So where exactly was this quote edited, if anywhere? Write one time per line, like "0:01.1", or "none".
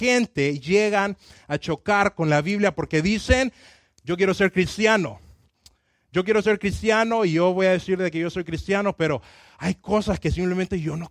0:04.0